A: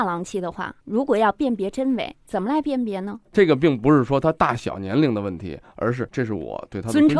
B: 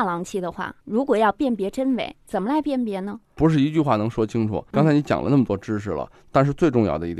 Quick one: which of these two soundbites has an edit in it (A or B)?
A